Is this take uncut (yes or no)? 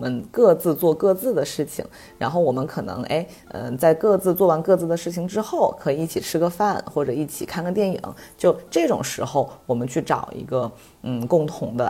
yes